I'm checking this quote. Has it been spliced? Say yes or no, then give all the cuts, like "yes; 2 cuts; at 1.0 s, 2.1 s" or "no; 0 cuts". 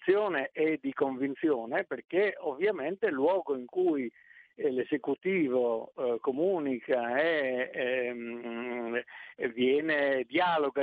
no; 0 cuts